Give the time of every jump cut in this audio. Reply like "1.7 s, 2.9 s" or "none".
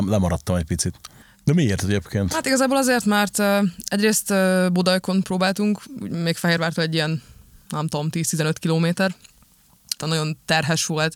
1.2 s, 10.0 s